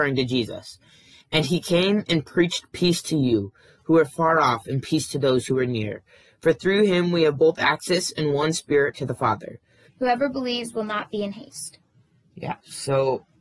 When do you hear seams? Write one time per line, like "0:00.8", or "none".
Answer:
0:09.9